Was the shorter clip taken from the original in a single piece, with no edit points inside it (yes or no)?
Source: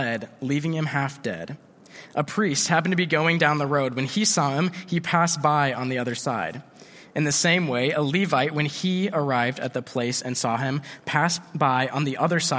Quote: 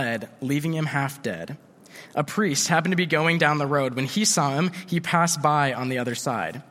yes